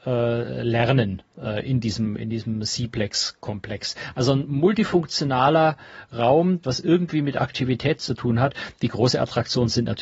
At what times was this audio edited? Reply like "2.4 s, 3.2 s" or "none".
1.3 s, 6.6 s